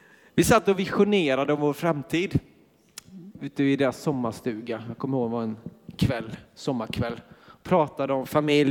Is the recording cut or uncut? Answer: uncut